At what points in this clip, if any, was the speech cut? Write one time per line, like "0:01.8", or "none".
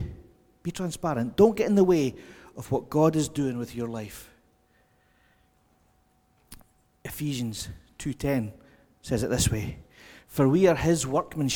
none